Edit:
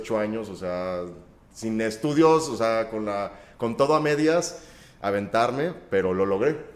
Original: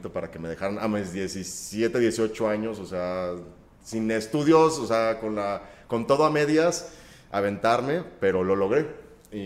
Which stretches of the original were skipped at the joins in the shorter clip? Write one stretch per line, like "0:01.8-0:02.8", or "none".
none